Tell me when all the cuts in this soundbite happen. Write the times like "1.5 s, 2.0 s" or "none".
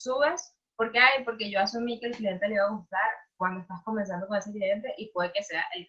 none